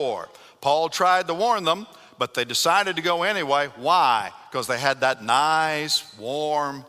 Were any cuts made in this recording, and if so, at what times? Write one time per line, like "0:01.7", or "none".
none